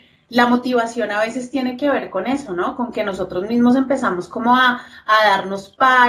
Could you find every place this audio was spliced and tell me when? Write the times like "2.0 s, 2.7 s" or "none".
none